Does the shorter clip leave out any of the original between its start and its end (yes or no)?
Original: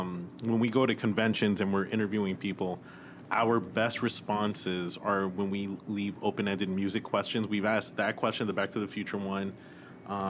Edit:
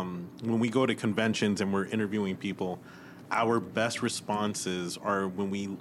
no